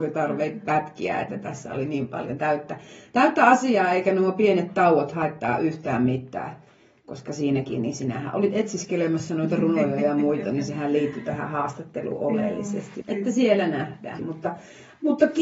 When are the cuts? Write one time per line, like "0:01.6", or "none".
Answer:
0:13.0
0:14.2